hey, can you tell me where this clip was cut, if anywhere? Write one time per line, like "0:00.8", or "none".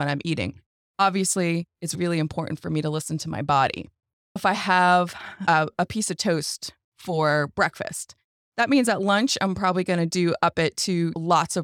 none